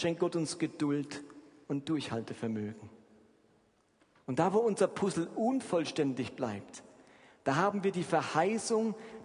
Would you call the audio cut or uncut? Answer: uncut